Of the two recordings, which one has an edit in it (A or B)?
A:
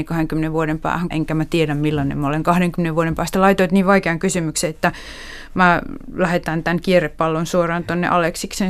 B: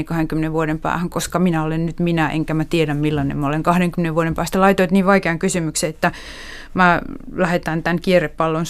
A